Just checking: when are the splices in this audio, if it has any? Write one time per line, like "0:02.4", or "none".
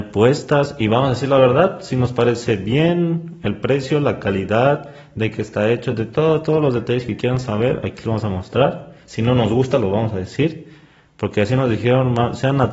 none